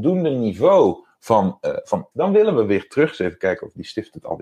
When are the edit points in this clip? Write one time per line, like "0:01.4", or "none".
0:02.1